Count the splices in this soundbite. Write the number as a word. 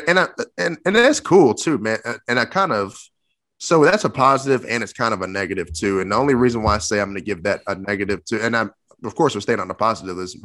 zero